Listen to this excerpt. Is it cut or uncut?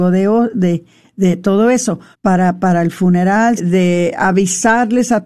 cut